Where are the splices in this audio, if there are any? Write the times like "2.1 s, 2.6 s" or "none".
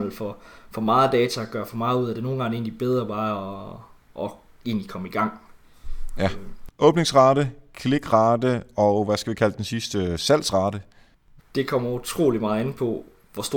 6.7 s, 11.4 s

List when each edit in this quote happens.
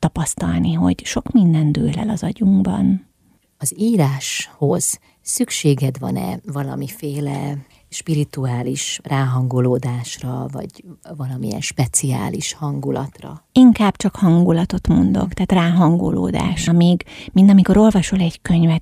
13.5 s, 16.7 s

